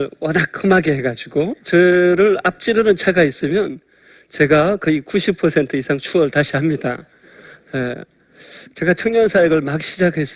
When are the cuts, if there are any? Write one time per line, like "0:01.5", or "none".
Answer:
0:08.7